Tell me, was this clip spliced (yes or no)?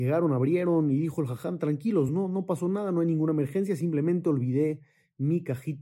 no